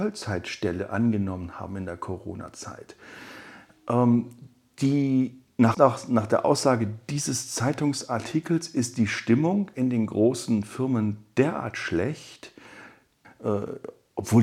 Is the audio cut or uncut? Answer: cut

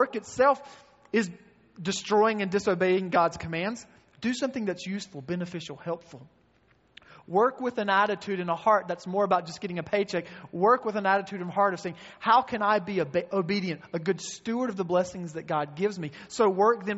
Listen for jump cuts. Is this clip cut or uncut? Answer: uncut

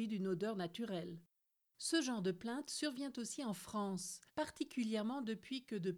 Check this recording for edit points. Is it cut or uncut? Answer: cut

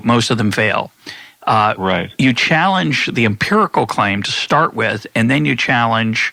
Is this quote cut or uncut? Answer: uncut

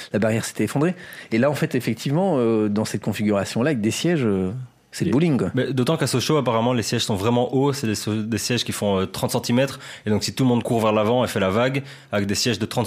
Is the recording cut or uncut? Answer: uncut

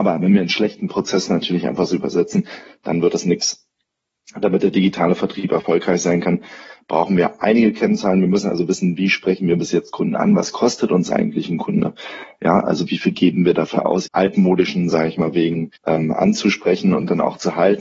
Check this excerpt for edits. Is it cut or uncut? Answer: cut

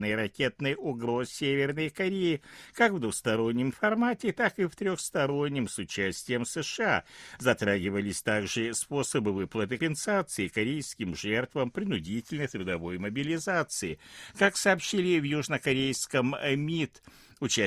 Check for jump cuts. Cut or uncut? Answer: cut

